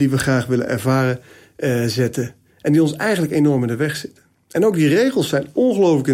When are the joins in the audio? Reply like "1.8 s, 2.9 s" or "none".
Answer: none